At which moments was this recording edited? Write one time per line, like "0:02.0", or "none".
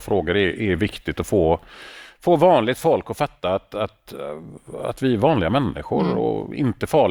none